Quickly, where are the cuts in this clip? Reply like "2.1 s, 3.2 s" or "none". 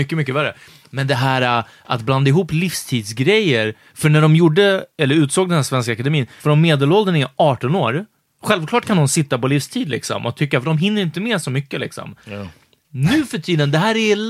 6.4 s